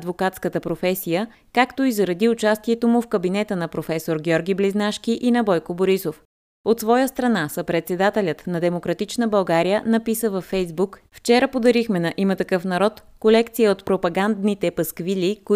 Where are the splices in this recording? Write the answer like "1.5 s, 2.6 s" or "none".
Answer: 11.1 s

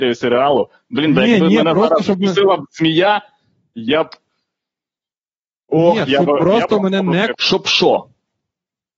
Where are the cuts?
7.3 s

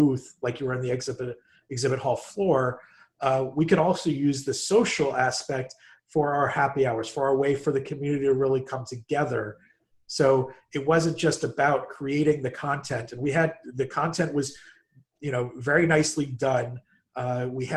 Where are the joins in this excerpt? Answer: none

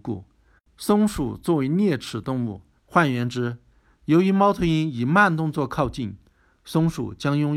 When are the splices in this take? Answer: 2.8 s

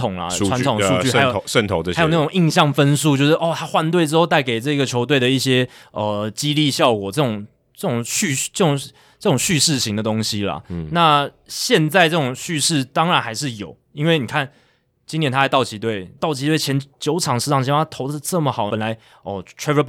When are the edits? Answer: 16.2 s, 18.7 s

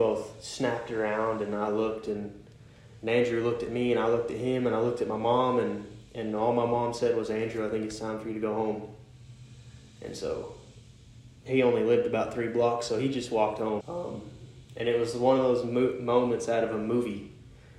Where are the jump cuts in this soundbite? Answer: 13.8 s

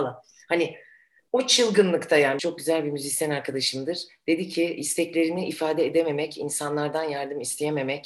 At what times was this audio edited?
2.4 s

